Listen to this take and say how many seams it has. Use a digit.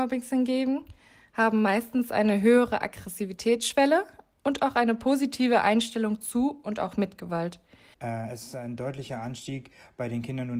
1